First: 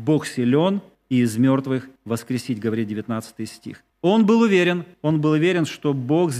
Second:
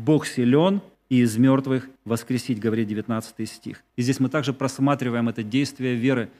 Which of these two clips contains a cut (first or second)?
second